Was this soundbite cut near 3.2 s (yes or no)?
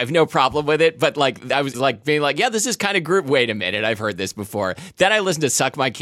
no